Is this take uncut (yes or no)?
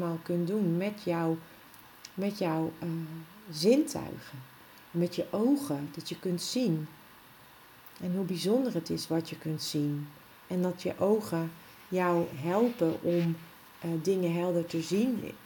yes